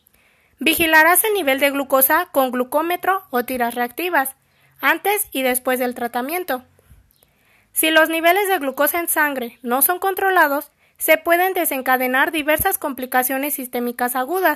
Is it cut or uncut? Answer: uncut